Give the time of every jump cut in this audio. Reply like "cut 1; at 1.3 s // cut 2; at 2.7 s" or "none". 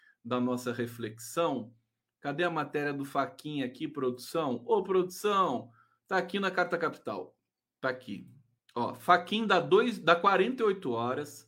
cut 1; at 7.7 s